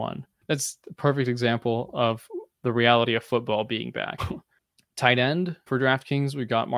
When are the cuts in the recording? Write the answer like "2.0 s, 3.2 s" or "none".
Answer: 4.2 s, 5.7 s